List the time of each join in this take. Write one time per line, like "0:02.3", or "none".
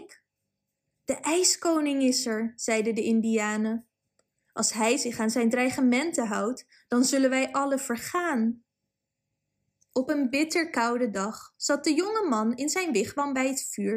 none